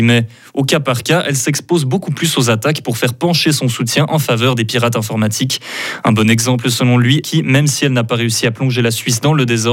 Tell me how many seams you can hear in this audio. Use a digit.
1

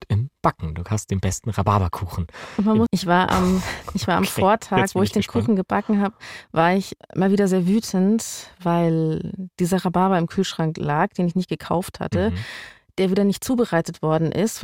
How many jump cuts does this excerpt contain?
1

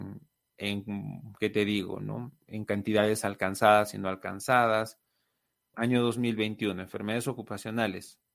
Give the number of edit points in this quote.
1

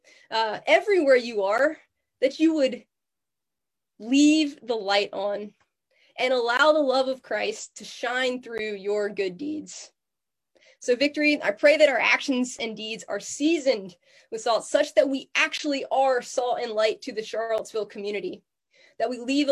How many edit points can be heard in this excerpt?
0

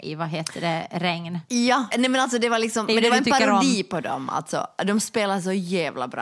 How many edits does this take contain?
1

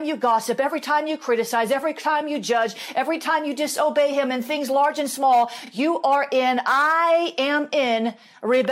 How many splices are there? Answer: 0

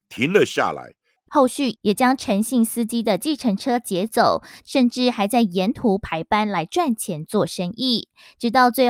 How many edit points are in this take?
2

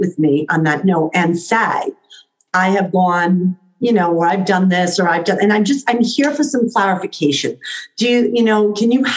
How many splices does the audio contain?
0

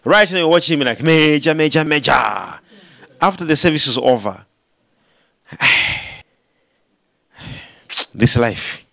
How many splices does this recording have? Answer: 2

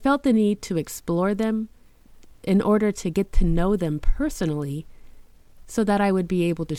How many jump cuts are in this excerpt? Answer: 0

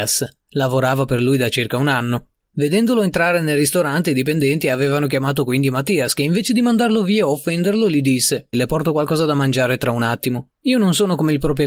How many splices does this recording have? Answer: 2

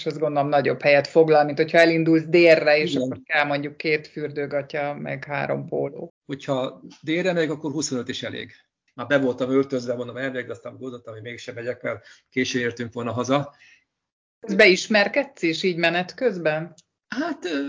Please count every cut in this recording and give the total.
2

